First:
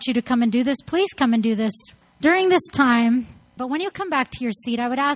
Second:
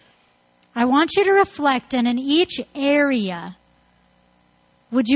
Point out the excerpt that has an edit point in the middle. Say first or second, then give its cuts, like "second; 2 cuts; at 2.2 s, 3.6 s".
first; 2 cuts; at 2.0 s, 3.6 s